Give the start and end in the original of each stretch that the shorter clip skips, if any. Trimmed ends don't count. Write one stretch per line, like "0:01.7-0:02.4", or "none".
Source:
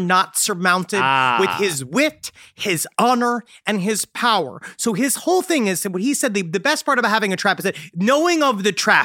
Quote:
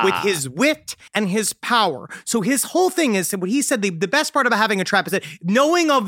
0:02.4-0:03.6